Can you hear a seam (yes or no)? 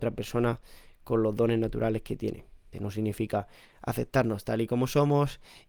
yes